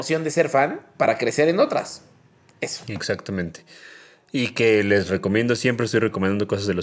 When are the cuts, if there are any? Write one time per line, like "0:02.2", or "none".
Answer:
none

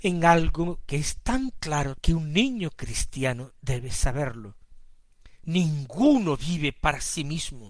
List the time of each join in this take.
0:02.0
0:05.4

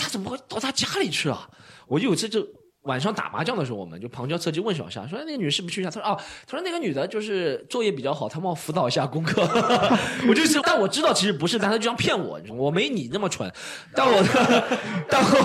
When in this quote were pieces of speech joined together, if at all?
0:10.6
0:12.5

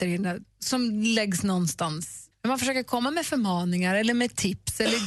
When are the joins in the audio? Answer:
0:02.3

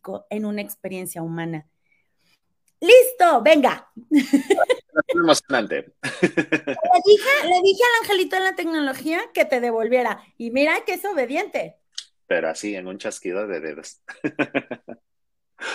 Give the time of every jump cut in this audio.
none

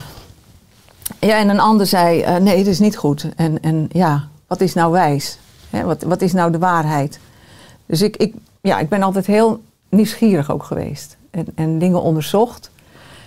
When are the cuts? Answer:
none

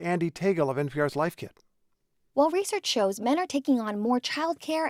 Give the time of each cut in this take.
none

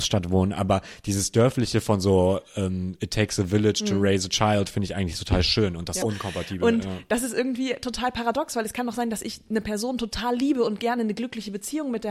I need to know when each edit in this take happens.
0:06.0

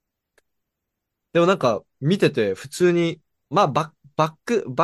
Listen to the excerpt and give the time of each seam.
0:03.5

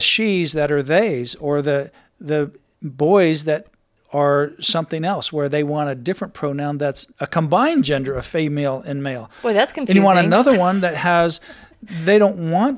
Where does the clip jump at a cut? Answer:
0:07.1

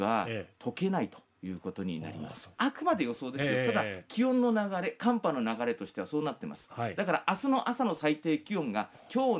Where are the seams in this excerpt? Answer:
0:02.5

